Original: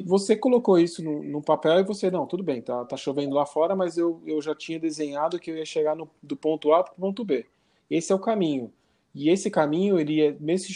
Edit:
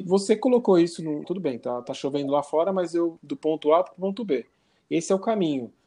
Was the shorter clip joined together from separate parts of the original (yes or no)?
yes